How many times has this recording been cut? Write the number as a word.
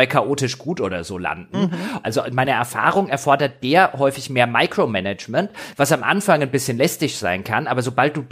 one